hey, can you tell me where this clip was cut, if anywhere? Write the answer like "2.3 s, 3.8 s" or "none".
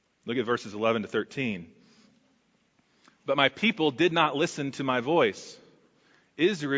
none